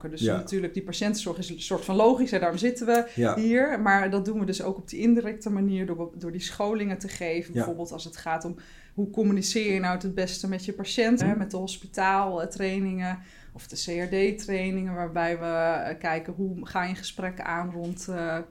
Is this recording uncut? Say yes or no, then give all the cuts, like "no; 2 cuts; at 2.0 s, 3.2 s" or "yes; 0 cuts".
no; 1 cut; at 11.2 s